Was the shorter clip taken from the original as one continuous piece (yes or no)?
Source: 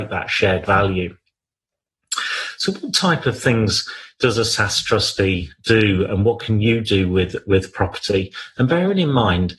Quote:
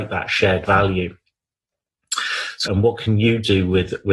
no